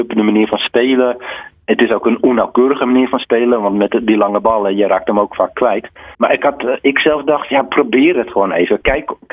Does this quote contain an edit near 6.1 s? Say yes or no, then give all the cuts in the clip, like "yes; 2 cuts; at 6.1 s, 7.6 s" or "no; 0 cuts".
yes; 1 cut; at 6.1 s